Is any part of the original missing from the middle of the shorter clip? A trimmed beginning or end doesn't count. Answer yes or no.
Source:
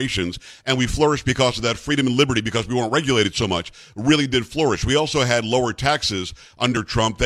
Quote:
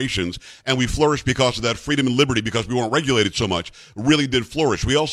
no